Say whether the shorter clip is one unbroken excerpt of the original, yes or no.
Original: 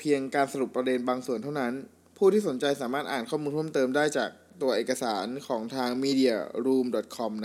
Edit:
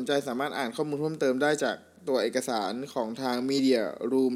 yes